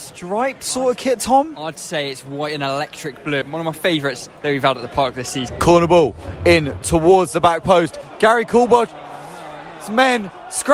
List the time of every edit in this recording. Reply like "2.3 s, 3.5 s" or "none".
3.4 s